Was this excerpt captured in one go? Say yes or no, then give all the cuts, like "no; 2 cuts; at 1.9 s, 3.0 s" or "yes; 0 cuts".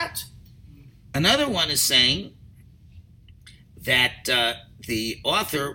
no; 1 cut; at 1.0 s